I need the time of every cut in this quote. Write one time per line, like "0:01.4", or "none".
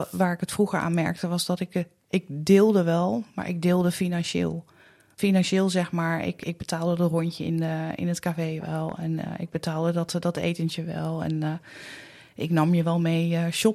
none